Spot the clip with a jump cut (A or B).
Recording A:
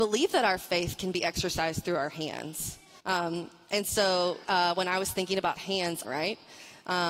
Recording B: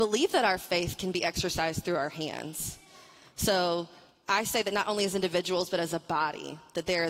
A